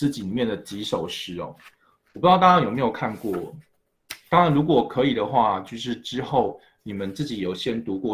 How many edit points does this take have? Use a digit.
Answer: 0